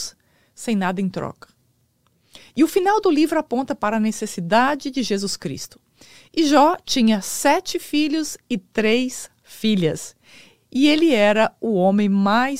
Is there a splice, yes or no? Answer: no